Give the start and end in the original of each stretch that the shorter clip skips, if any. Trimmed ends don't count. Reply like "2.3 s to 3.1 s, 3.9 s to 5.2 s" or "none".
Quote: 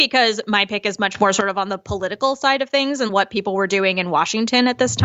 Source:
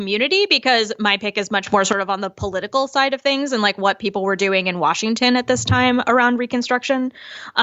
3.6 s to 3.7 s